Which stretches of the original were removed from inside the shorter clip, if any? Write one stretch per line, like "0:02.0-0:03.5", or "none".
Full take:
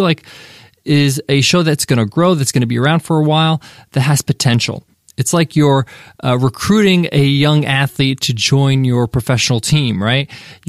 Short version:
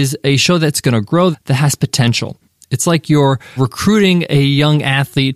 0:02.4-0:03.8
0:06.0-0:06.4